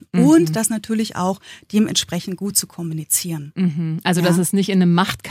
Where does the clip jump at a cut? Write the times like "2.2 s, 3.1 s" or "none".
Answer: none